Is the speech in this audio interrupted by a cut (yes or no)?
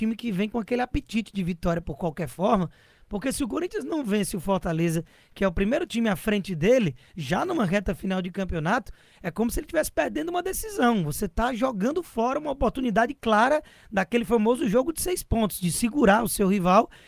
no